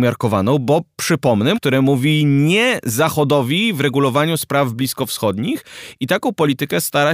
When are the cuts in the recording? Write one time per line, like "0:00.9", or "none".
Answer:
0:01.5